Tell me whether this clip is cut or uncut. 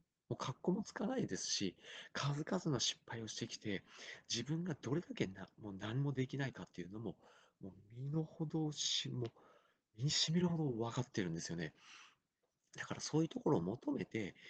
uncut